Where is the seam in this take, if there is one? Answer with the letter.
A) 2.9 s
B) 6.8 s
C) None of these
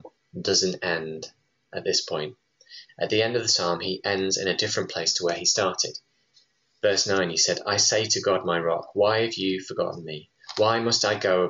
A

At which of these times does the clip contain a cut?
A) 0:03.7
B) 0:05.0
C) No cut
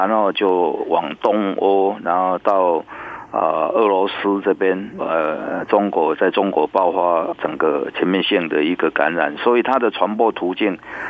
B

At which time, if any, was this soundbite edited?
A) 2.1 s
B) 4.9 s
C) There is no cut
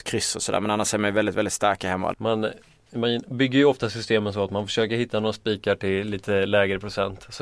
A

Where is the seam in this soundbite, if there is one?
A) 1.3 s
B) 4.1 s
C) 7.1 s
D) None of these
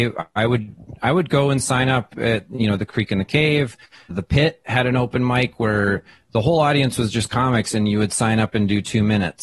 B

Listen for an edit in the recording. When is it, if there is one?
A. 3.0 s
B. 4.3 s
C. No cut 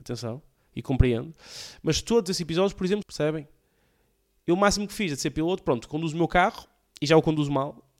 A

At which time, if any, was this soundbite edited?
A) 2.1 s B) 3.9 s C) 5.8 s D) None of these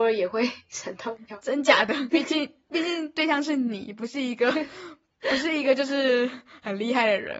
A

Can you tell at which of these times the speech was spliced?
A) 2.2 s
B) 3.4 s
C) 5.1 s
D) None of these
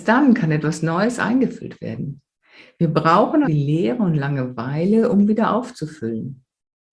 B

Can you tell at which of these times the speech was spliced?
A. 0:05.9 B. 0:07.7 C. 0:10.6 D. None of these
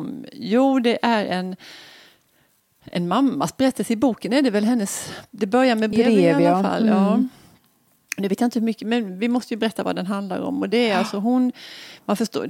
A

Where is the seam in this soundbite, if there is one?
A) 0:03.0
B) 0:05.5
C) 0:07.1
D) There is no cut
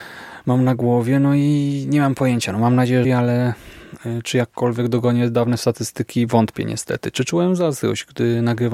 A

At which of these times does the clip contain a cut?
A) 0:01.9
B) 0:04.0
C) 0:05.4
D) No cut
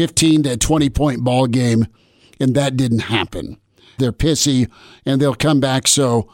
B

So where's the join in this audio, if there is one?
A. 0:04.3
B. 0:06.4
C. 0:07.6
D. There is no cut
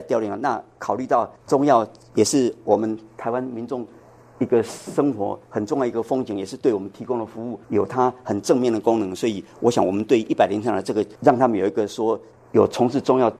C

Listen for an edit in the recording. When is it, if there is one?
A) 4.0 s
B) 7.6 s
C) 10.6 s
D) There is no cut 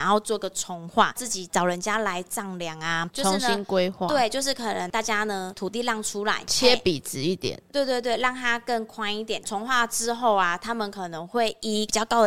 D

